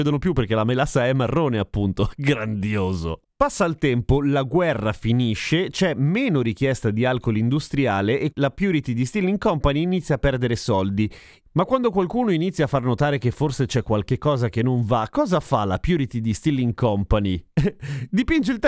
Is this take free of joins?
no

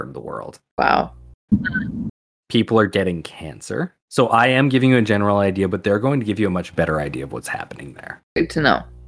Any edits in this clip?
yes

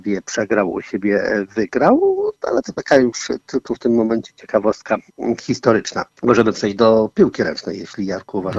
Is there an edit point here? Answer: yes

